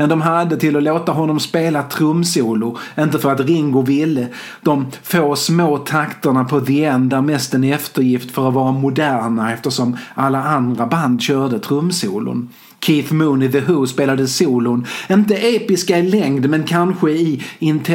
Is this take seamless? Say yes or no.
yes